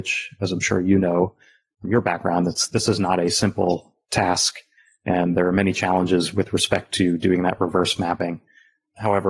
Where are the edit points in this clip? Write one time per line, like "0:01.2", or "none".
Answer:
none